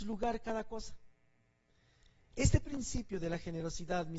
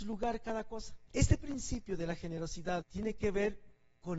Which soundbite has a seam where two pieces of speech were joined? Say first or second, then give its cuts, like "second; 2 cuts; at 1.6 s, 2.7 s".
second; 2 cuts; at 1.0 s, 2.8 s